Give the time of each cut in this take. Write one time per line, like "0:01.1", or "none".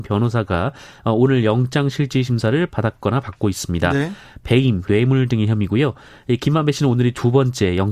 0:04.9